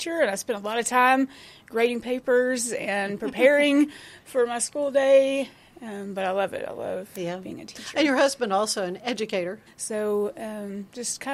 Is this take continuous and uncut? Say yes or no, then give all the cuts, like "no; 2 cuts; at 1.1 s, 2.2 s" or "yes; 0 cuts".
no; 1 cut; at 9.7 s